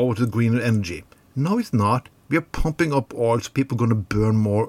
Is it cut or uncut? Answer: uncut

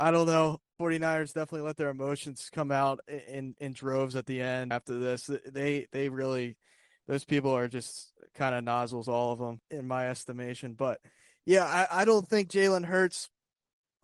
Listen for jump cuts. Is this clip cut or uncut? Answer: cut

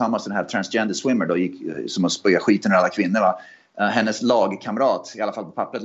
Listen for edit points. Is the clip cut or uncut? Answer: uncut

